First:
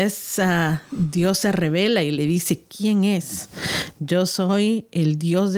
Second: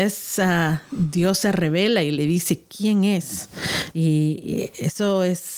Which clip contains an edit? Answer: second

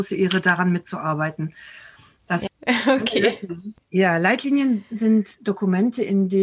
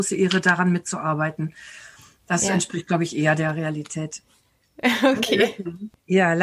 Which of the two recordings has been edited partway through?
first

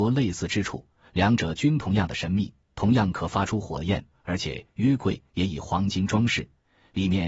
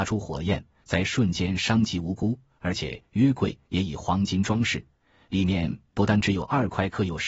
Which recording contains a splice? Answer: first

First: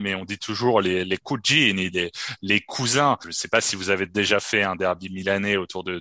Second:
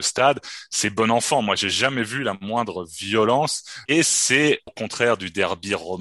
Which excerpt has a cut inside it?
second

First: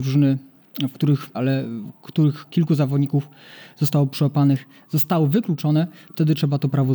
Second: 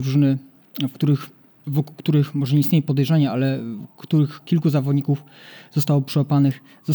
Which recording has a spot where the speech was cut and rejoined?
first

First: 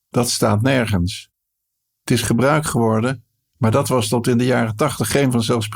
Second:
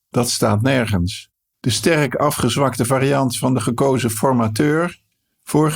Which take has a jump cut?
second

